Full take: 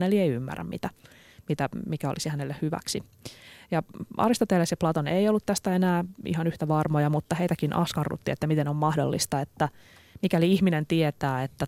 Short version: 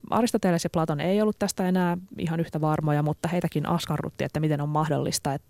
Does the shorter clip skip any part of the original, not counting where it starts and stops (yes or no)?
no